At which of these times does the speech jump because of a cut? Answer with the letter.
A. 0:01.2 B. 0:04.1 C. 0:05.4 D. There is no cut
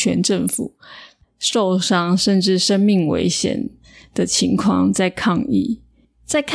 A